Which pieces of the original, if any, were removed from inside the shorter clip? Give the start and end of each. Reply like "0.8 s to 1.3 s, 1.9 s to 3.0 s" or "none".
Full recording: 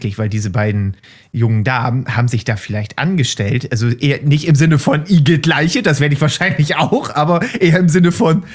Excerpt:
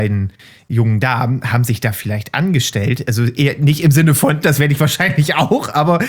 5.1 s to 5.8 s